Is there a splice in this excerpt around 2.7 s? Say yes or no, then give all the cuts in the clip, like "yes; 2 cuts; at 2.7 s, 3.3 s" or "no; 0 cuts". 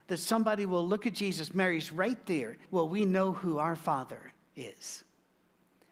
yes; 1 cut; at 2.7 s